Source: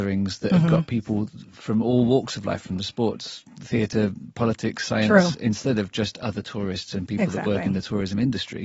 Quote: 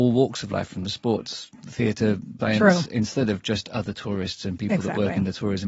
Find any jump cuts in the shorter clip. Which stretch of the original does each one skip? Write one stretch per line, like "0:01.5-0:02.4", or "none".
0:04.3-0:04.9